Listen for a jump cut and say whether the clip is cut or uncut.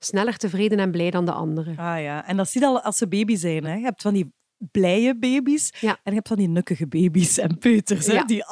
uncut